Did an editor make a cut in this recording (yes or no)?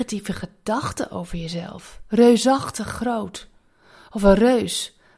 no